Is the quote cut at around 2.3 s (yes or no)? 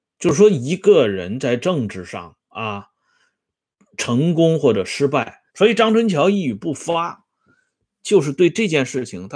no